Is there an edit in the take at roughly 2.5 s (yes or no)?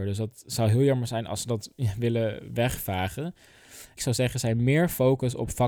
no